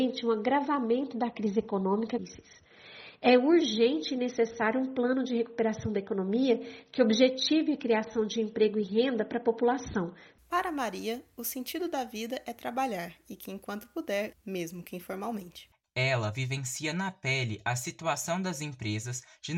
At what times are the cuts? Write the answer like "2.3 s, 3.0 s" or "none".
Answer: 14.3 s